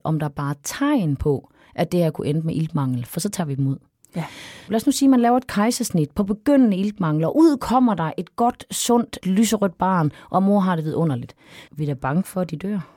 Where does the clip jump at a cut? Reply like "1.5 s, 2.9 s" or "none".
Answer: 4.7 s, 9.2 s, 11.7 s